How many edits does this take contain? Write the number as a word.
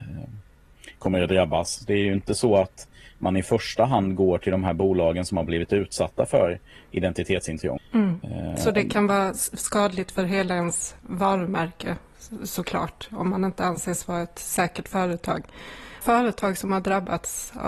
two